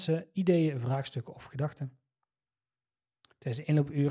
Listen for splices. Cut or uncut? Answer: uncut